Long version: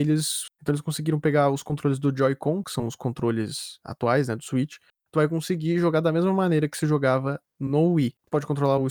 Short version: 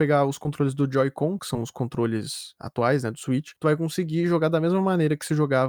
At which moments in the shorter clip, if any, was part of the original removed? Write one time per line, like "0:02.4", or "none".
0:03.6